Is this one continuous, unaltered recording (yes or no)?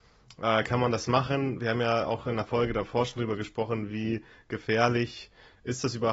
yes